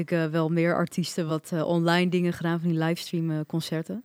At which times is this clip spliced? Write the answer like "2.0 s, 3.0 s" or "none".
1.3 s